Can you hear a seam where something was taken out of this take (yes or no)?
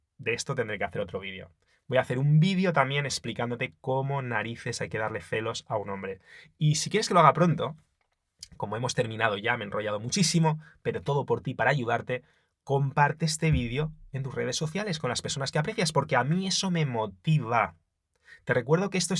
no